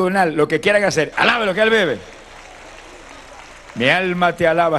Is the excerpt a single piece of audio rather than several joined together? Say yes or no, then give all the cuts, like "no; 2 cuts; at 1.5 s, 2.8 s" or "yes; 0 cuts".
no; 1 cut; at 1.1 s